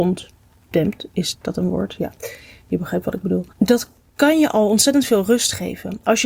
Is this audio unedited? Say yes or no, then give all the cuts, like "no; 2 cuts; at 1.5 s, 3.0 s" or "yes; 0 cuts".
no; 1 cut; at 3.5 s